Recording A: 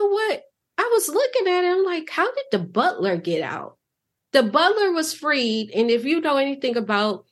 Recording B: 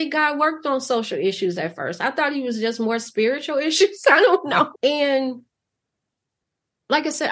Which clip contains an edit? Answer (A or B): B